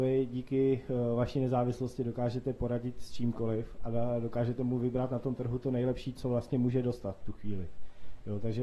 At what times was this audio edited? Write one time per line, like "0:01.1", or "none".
none